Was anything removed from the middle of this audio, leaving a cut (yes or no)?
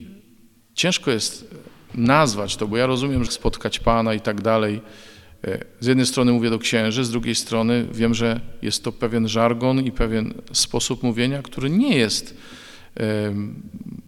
yes